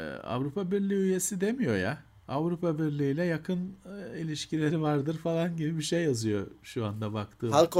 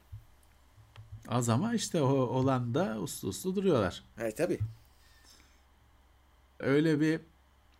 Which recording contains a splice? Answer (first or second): second